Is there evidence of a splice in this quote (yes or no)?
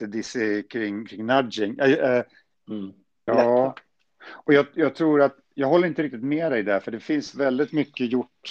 yes